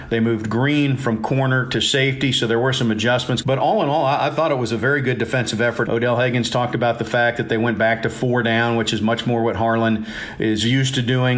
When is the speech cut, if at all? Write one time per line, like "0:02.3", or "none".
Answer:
0:03.4
0:05.8